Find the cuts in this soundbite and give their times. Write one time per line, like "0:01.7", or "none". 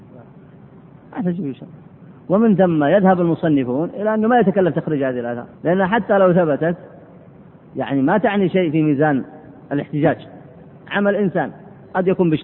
0:01.0
0:05.5